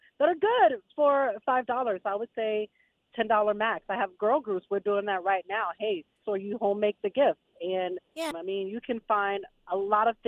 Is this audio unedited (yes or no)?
no